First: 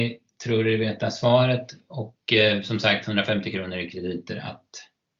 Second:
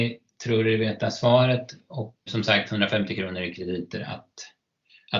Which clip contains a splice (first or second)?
second